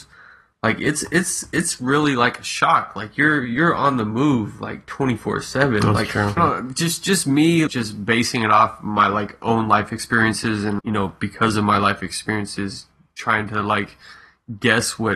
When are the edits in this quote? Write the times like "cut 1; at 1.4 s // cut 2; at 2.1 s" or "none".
cut 1; at 6.4 s // cut 2; at 7.7 s // cut 3; at 10.8 s